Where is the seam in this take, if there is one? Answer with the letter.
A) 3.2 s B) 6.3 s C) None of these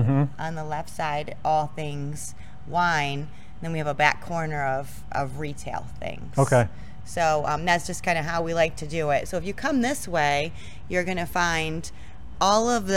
C